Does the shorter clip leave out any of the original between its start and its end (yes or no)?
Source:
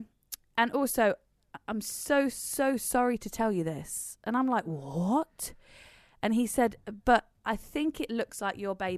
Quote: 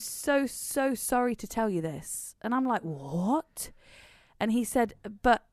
no